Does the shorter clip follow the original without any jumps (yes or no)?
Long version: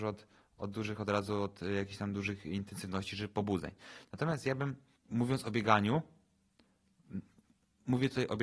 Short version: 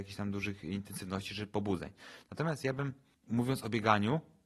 yes